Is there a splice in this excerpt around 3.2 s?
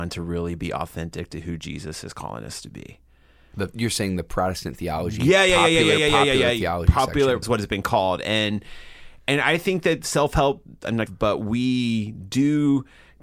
no; 2 cuts; at 7.4 s, 11.1 s

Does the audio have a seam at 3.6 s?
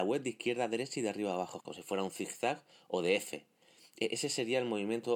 no; 1 cut; at 1.6 s

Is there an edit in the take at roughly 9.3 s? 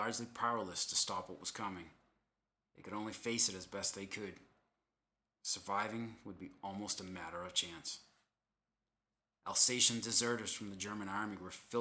yes; 1 cut; at 9.3 s

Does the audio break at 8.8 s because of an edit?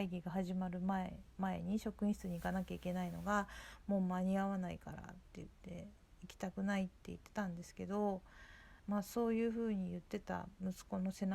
yes; 1 cut; at 8.8 s

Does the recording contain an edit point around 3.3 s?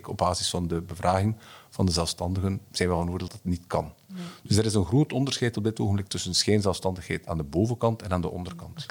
yes; 1 cut; at 3.3 s

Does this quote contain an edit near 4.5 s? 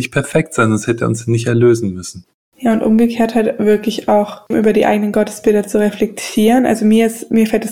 yes; 1 cut; at 4.5 s

